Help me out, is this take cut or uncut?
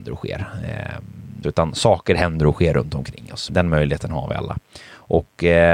cut